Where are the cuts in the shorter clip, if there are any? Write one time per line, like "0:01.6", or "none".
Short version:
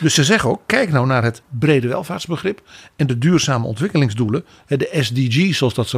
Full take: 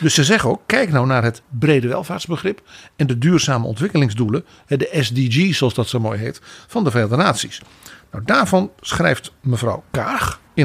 none